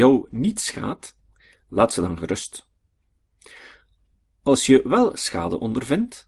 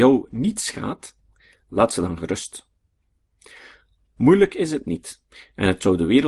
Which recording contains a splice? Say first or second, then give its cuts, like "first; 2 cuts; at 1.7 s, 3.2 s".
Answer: second; 1 cut; at 4.1 s